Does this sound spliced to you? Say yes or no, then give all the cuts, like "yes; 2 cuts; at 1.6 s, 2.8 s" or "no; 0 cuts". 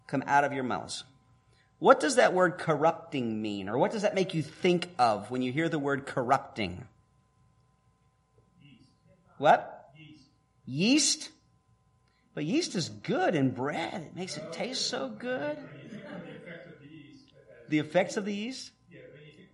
no; 0 cuts